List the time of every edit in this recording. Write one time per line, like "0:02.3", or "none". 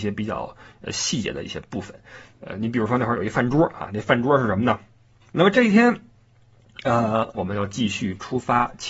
0:05.2
0:07.3